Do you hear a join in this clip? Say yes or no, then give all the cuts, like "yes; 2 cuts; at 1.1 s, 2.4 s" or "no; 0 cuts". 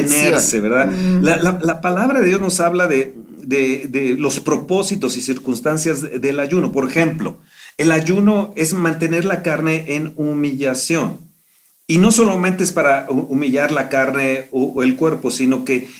no; 0 cuts